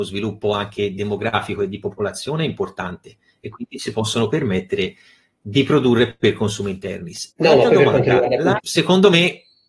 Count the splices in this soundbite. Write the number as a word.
two